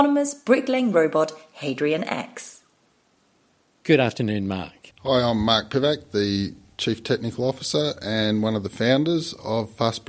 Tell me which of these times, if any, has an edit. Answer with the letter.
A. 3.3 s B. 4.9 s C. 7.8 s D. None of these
B